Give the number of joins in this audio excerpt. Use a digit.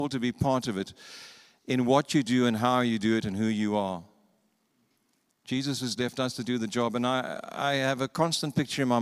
1